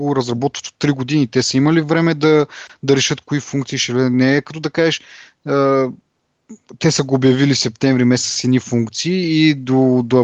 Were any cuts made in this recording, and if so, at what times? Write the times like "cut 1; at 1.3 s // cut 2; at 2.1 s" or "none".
none